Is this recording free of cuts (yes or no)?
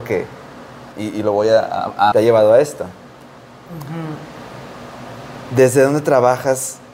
no